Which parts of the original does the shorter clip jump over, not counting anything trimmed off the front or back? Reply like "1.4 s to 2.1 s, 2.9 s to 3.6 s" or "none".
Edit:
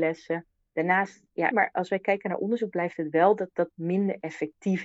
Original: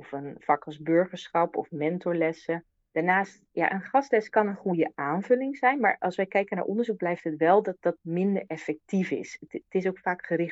3.7 s to 5.8 s